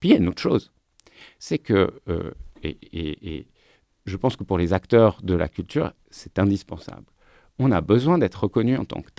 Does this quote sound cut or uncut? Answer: uncut